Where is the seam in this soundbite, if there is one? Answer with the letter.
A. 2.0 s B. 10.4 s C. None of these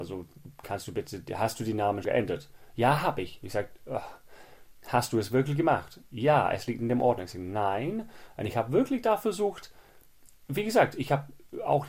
A